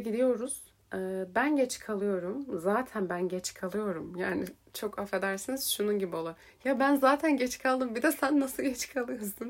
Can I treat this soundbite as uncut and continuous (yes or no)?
yes